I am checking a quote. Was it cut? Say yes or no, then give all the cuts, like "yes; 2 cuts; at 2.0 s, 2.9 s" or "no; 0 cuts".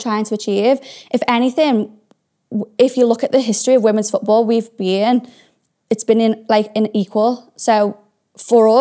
no; 0 cuts